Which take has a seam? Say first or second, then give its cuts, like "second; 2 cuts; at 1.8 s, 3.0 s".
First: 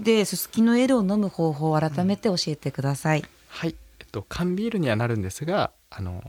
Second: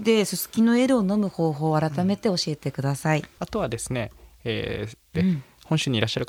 second; 2 cuts; at 3.4 s, 5.1 s